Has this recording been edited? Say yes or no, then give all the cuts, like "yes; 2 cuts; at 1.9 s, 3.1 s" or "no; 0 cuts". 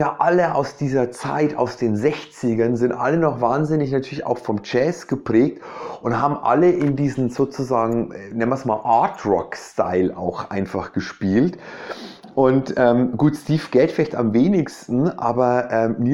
no; 0 cuts